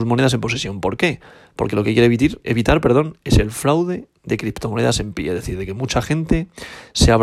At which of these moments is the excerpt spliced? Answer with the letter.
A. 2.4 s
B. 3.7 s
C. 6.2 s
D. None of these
A